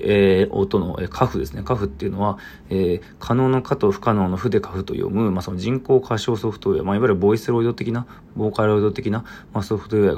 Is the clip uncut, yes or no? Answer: yes